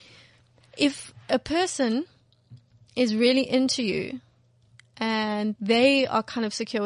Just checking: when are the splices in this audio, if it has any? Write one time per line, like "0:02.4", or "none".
0:05.6